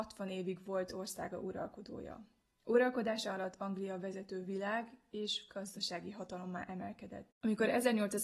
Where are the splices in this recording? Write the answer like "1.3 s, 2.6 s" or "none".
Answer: 7.3 s